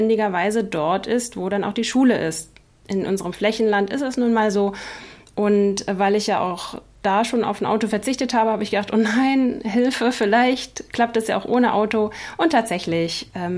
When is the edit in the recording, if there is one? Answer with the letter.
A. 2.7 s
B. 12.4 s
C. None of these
C